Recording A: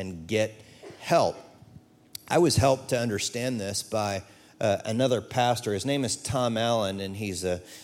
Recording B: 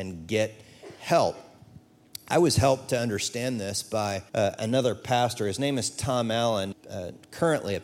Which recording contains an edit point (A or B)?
B